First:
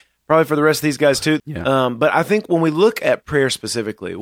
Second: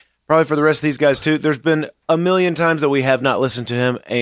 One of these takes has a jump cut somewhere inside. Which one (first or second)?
first